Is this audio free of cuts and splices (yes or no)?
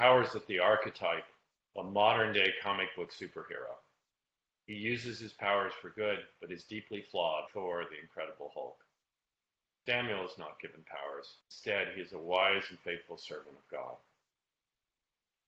no